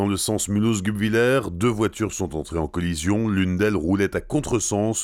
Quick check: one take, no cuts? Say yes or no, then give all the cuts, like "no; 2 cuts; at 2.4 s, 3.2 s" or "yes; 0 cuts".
yes; 0 cuts